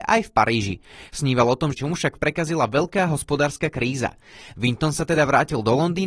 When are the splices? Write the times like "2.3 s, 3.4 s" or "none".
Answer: 1.7 s